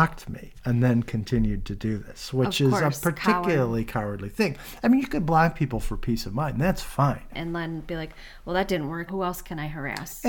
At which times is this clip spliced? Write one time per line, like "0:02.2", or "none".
0:07.3
0:09.1